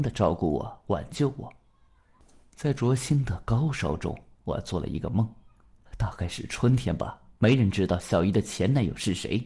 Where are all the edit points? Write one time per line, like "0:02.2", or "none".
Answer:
0:05.8
0:07.4